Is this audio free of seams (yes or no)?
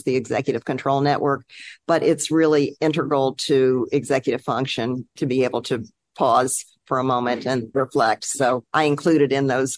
yes